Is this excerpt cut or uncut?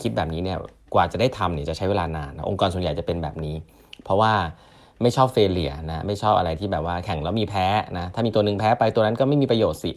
uncut